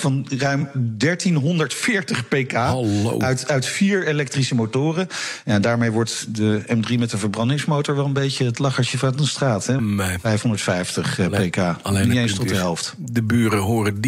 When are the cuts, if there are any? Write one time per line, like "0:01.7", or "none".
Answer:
0:09.8